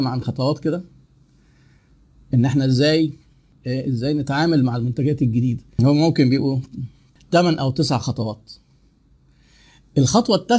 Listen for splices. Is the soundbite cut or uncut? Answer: uncut